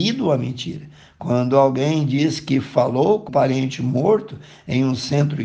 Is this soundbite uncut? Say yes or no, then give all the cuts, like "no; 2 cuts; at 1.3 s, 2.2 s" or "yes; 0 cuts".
no; 1 cut; at 3.3 s